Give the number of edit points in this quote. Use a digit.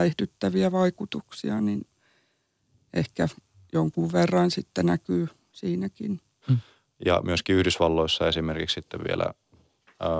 1